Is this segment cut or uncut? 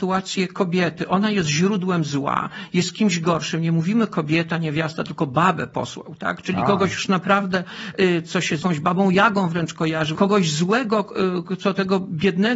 cut